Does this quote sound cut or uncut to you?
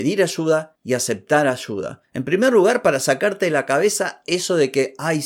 uncut